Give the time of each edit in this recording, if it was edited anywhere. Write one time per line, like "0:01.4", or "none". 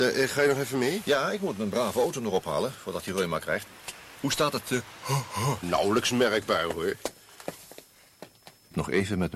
0:05.6